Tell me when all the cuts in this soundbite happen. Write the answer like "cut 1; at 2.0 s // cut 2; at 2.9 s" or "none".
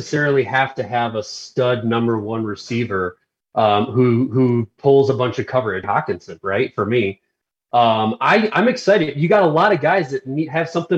cut 1; at 5.8 s